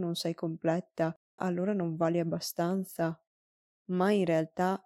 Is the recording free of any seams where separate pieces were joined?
no; 2 cuts; at 1.4 s, 3.7 s

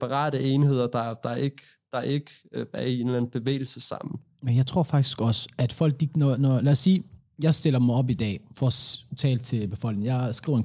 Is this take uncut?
yes; 0 cuts

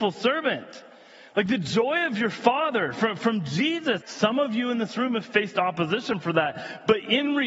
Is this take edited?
yes; 1 cut; at 4.0 s

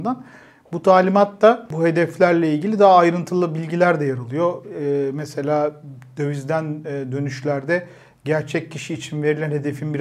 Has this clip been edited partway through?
no; 0 cuts

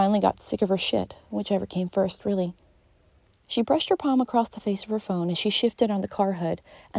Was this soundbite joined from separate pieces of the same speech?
yes; 1 cut; at 3.3 s

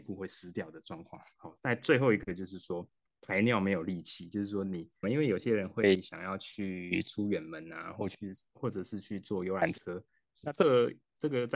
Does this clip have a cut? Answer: yes; 2 cuts; at 1.4 s, 5.0 s

